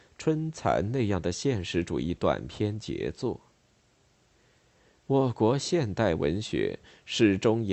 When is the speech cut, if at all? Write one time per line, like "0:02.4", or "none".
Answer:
none